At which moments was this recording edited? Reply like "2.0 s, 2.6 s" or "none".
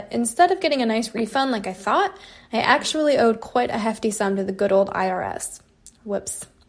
none